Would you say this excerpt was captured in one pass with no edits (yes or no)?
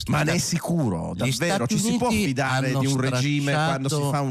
yes